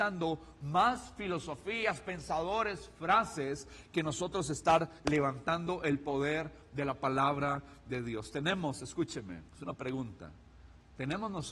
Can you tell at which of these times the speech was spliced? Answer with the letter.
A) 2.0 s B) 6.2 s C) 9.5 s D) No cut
C